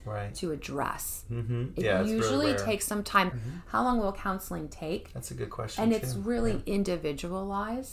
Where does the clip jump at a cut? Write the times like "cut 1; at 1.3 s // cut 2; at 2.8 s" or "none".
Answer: cut 1; at 3.3 s